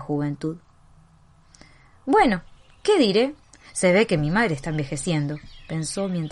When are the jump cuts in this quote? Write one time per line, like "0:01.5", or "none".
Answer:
none